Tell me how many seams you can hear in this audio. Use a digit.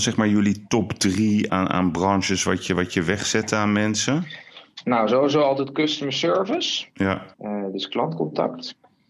2